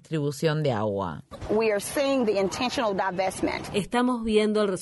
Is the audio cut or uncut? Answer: uncut